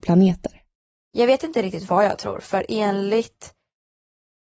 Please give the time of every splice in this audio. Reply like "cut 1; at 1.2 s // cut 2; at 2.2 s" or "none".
none